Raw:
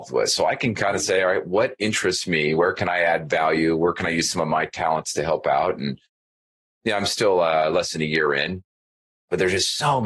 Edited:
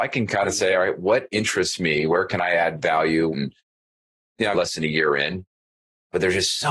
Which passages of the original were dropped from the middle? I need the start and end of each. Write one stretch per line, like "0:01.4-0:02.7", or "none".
0:03.8-0:05.8
0:07.0-0:07.7